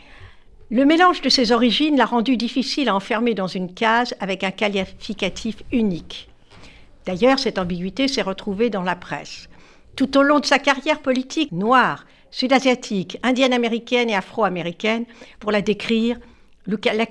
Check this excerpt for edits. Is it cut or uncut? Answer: cut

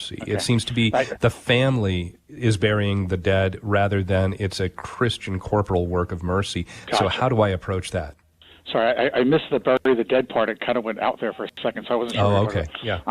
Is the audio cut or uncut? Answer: uncut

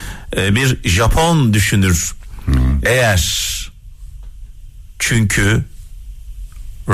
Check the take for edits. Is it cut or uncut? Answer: cut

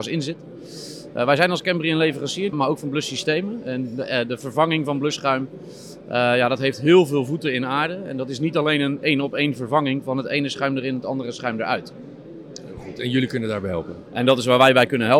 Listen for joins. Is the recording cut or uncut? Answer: cut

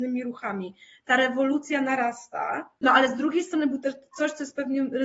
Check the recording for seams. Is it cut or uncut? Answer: cut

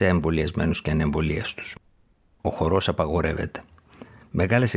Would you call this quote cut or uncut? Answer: uncut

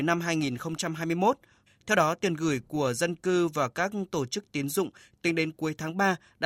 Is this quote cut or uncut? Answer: cut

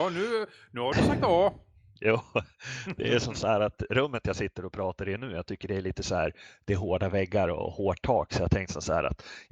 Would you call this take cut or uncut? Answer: uncut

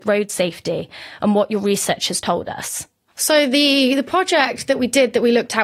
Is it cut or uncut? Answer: uncut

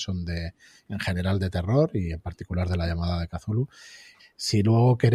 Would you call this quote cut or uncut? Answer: cut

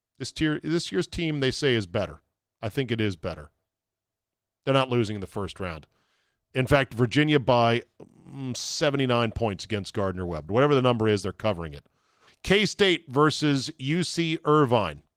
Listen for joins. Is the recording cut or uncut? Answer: cut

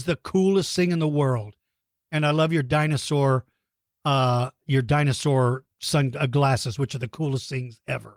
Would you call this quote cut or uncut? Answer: uncut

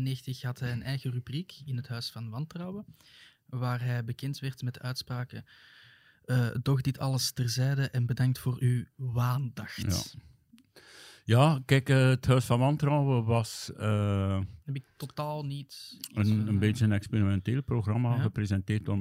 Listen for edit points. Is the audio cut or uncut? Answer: uncut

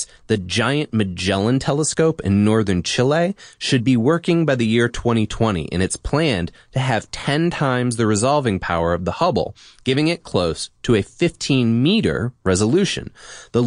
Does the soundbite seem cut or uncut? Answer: uncut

